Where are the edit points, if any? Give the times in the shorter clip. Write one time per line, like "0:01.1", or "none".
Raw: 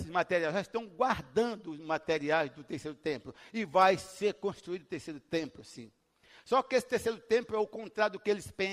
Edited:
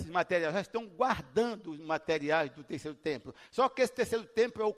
0:03.5